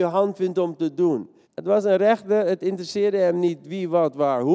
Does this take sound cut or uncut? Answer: cut